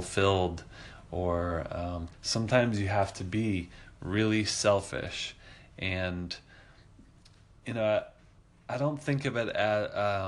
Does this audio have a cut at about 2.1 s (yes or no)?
yes